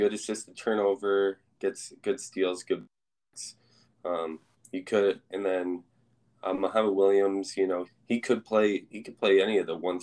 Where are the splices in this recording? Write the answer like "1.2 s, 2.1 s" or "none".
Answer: 7.8 s